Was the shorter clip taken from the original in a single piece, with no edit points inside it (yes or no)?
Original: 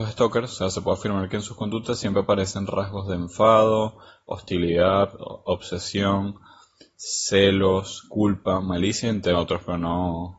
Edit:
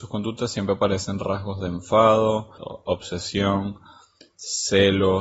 no